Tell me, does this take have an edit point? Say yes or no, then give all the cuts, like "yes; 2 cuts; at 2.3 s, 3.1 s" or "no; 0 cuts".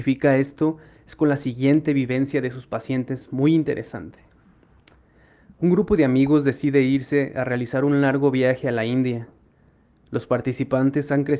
no; 0 cuts